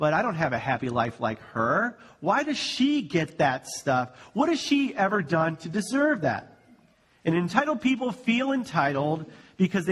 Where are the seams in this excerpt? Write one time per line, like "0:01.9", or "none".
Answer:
none